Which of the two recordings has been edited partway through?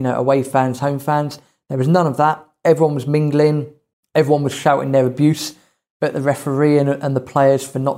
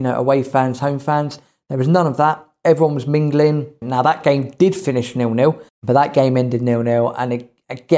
second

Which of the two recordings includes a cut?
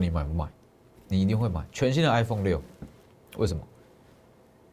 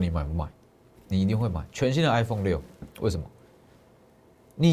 second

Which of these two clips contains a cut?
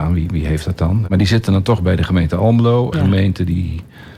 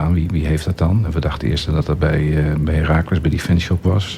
first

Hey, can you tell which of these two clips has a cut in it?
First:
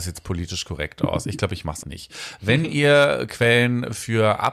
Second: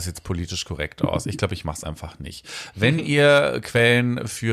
first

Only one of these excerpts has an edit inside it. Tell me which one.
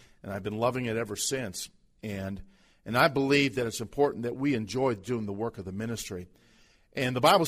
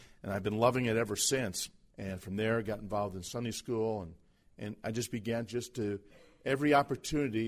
second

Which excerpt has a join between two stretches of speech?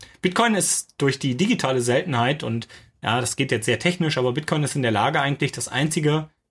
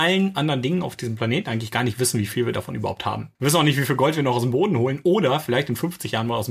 second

